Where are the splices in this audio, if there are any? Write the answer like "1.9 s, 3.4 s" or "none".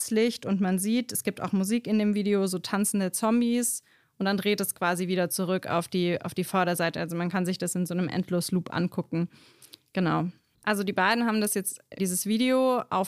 10.5 s, 12.0 s